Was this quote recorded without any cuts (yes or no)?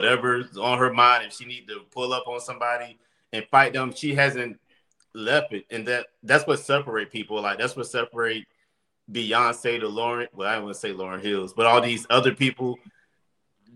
yes